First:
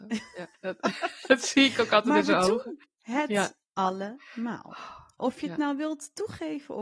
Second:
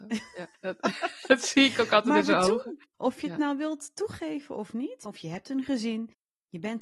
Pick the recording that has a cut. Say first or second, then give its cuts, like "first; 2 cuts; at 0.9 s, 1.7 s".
second; 2 cuts; at 2.9 s, 5.1 s